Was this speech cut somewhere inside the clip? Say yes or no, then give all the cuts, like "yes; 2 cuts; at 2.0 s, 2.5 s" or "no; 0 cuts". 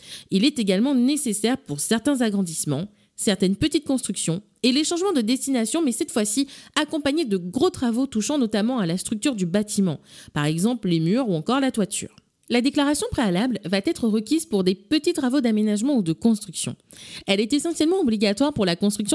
yes; 1 cut; at 12.3 s